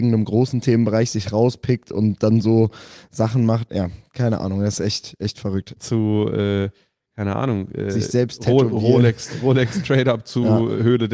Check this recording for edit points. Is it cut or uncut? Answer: cut